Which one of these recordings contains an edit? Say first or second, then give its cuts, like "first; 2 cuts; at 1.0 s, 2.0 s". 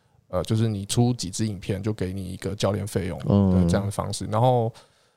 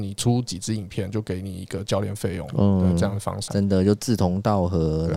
second; 1 cut; at 3.5 s